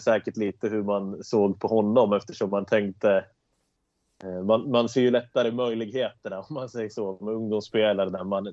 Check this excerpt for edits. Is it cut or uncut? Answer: uncut